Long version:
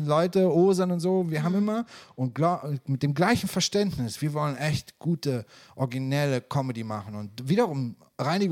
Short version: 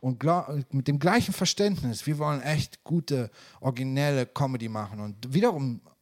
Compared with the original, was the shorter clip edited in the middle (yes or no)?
no